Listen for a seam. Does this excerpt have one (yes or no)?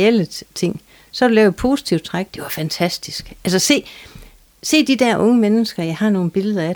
yes